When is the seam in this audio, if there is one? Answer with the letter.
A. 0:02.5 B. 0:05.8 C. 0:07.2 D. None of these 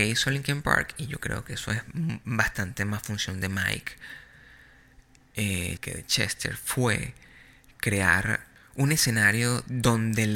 B